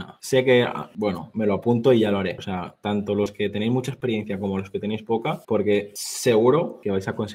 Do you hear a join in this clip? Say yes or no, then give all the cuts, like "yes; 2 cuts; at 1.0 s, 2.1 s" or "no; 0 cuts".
yes; 2 cuts; at 2.4 s, 5.4 s